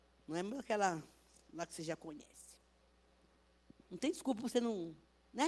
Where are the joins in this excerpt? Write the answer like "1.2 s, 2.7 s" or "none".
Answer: 3.8 s